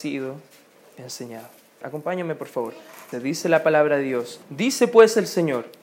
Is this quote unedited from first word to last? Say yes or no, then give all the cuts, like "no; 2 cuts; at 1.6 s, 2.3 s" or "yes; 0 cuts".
no; 3 cuts; at 1.8 s, 3.1 s, 4.4 s